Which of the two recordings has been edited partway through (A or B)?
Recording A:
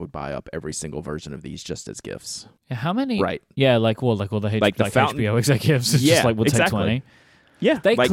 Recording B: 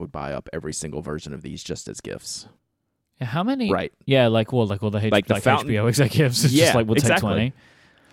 A